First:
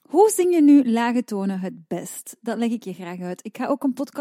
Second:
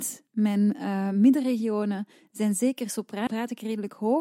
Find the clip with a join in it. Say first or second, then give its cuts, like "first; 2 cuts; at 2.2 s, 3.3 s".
second; 1 cut; at 3.3 s